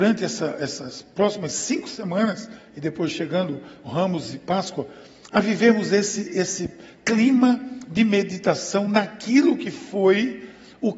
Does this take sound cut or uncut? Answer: uncut